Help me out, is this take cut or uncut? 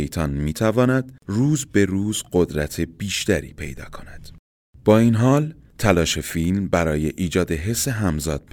uncut